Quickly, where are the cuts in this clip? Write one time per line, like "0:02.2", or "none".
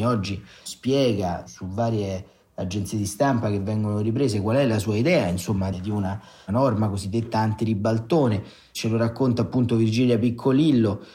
0:05.7

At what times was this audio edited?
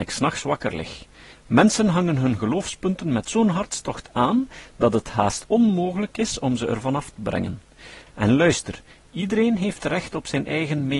0:01.3
0:08.1

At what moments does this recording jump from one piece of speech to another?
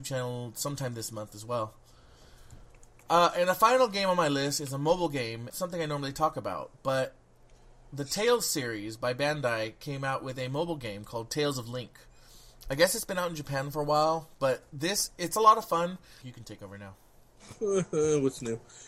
0:05.5
0:16.2

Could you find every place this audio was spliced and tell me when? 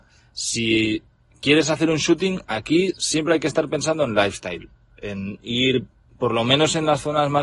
none

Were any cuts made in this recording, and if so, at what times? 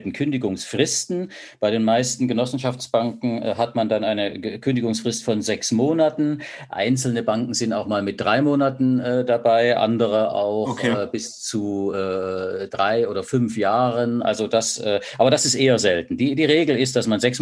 none

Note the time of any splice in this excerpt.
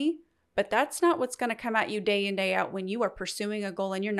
none

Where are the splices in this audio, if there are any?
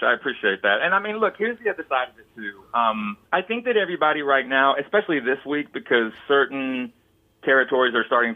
0:03.3

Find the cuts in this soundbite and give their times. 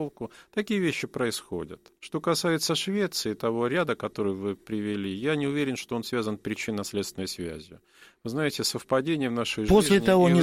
0:02.0

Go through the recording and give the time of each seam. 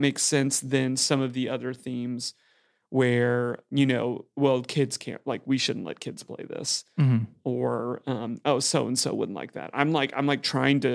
none

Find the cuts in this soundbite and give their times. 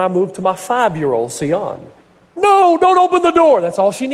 0:02.4

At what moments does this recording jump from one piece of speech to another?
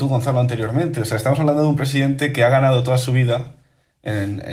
none

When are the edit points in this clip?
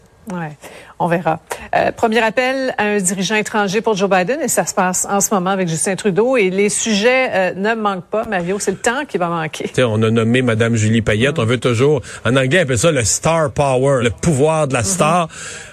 0:09.7
0:14.0

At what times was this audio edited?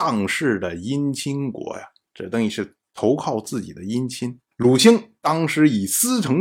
0:04.5

